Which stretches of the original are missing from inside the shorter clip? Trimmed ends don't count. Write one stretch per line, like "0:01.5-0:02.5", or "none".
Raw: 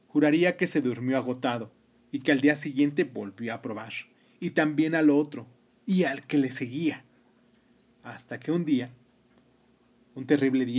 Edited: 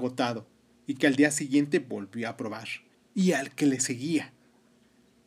0:04.2-0:05.7